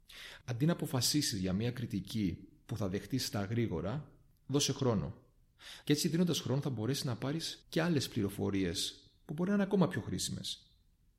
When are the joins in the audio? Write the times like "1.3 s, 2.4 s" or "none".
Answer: 5.8 s, 7.6 s